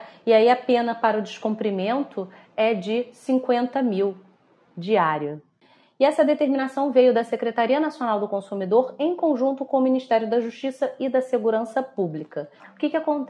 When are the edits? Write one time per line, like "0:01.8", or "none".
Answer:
none